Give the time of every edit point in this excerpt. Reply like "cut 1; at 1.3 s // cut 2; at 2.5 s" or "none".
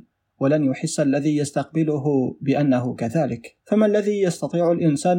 cut 1; at 3.6 s